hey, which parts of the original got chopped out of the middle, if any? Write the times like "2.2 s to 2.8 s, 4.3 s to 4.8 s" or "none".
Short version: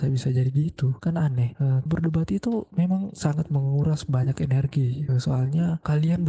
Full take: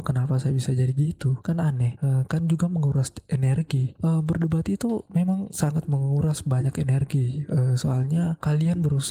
2.3 s to 4.2 s, 7.5 s to 7.7 s